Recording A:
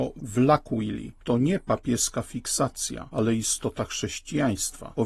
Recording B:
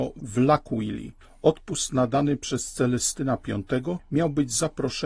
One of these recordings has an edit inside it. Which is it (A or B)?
A